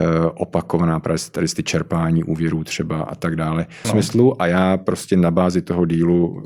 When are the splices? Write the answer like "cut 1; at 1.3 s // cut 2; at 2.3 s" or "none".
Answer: cut 1; at 3.8 s